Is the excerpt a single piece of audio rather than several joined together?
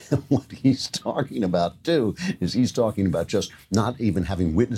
yes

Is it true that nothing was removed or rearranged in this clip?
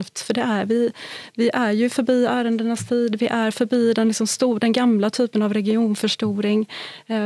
yes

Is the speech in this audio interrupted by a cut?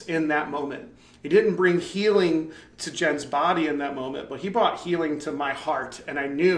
no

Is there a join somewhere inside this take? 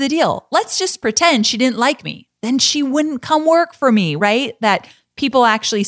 yes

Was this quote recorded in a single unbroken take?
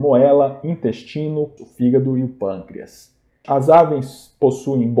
no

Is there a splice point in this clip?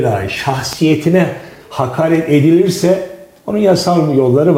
no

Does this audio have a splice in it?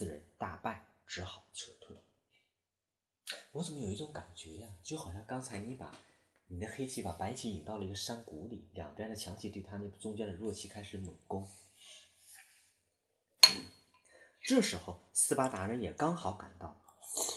no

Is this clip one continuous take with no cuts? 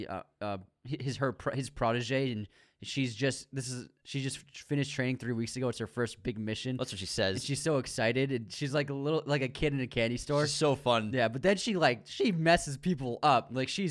yes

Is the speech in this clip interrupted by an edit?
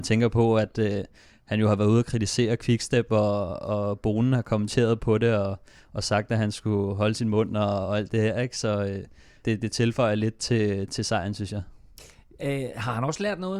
yes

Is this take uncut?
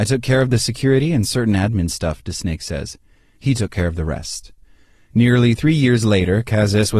yes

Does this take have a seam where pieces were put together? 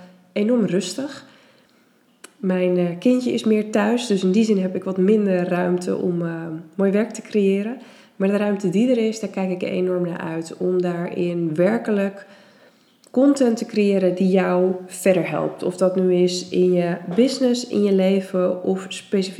no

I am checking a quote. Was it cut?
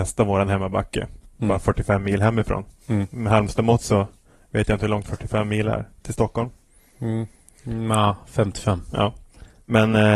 no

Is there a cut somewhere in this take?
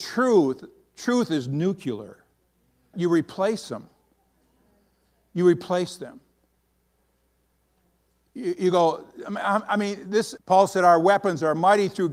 yes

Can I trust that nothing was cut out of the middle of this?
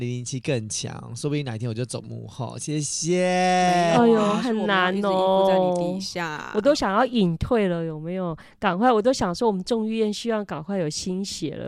yes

